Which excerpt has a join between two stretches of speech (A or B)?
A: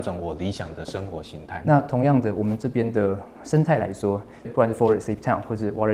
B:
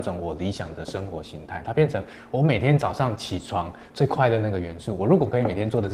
A